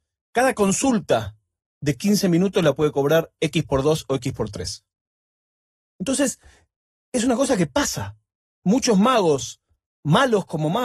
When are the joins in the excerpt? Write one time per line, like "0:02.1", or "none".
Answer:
none